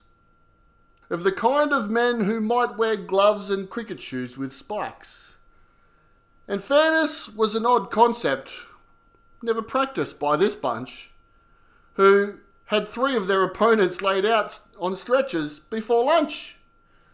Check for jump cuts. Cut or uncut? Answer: cut